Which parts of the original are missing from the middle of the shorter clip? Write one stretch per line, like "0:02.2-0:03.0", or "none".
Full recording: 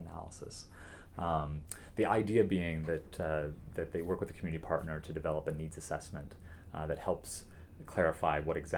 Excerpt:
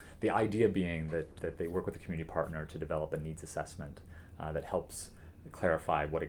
0:03.1-0:03.7